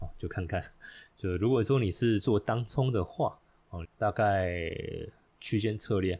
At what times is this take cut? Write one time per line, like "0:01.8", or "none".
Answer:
0:03.8

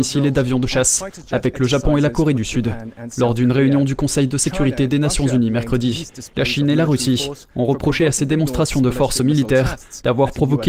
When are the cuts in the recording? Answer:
none

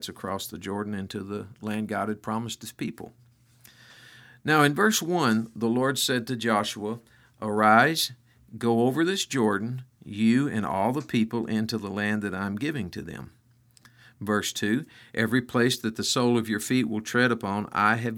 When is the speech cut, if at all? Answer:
none

